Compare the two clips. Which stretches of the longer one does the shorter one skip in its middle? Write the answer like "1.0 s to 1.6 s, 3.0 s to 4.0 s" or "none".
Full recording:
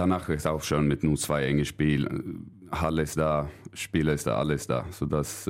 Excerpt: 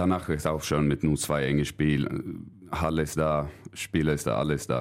none